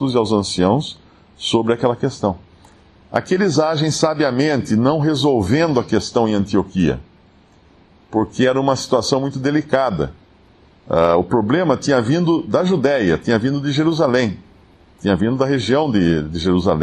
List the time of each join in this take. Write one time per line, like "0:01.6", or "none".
none